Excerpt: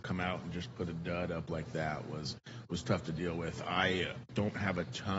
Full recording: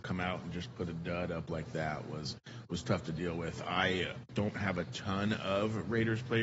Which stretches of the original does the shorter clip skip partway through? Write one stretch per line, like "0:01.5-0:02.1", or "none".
none

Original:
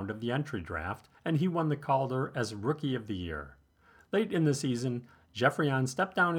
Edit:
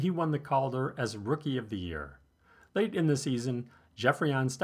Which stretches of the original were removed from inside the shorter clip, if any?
none

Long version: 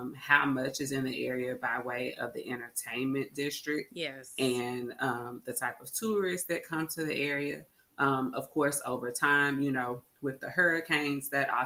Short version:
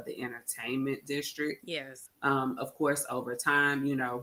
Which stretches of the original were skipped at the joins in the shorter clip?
0:04.3-0:07.8

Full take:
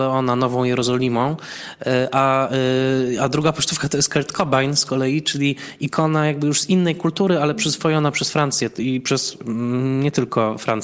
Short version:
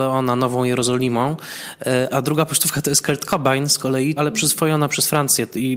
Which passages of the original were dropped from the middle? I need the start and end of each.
0:02.1-0:03.2
0:05.2-0:07.4

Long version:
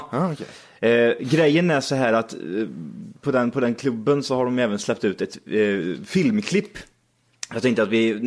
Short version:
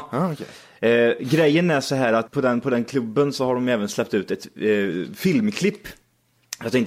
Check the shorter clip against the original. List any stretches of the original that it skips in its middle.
0:02.3-0:03.2

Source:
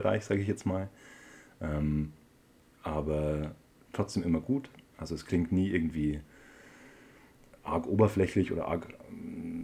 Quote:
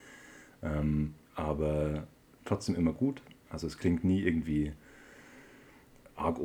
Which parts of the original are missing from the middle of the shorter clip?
0:02.2-0:02.7

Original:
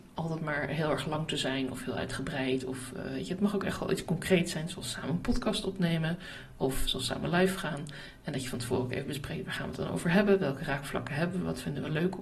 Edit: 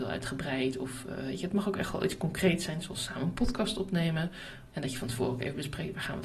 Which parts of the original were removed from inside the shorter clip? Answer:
0:06.5-0:08.2

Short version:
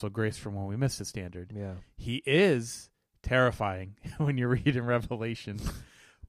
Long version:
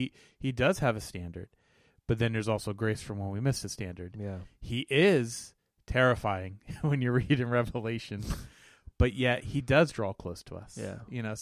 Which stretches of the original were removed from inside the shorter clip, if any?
none

